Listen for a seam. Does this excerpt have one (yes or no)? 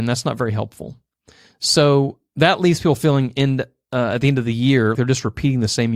yes